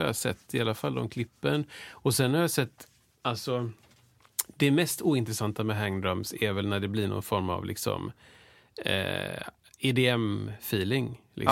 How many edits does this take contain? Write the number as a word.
zero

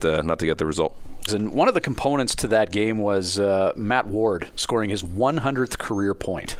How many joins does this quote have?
one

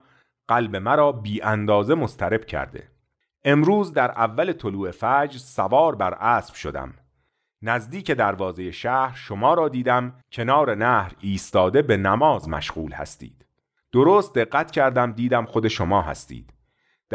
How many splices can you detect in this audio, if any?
one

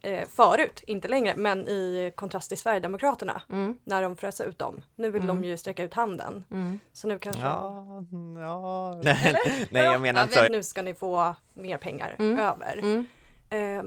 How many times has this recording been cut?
two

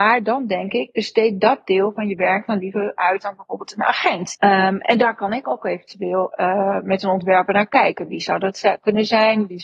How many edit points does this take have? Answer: one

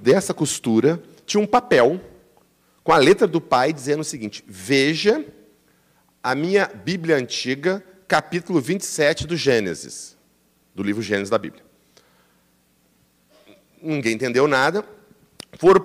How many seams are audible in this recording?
zero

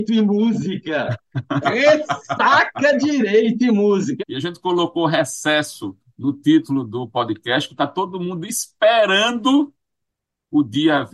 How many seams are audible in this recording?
two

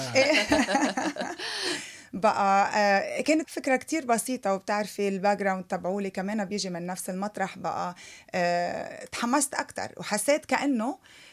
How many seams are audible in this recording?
one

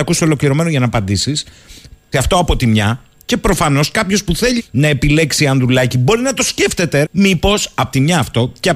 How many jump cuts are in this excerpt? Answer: three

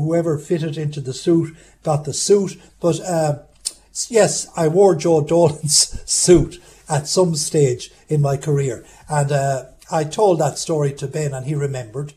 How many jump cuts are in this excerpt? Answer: one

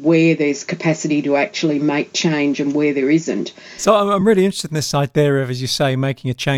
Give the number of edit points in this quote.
zero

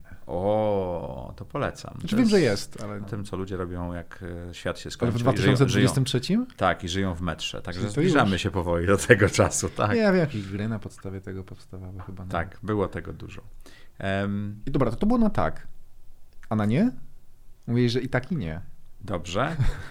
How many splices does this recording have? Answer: one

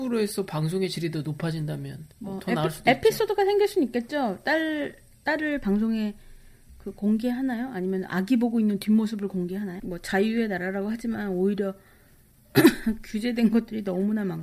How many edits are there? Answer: two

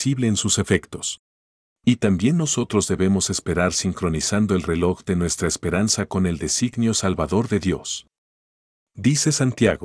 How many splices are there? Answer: one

